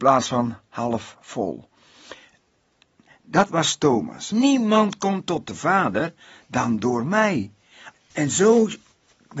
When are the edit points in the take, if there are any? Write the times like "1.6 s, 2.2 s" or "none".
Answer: 4.3 s, 7.9 s